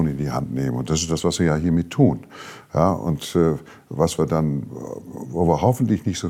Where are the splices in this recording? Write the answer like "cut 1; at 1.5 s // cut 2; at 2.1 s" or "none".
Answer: none